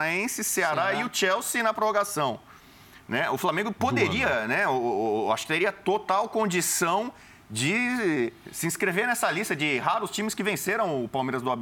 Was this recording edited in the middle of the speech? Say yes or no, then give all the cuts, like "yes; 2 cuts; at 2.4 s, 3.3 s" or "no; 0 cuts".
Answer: no; 0 cuts